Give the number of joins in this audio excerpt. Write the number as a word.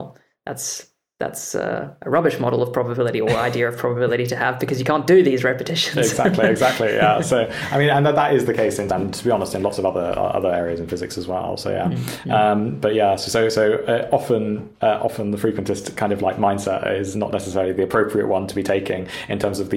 one